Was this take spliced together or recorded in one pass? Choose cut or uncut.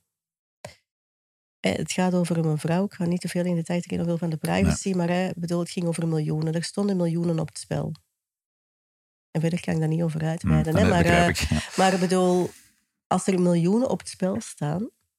uncut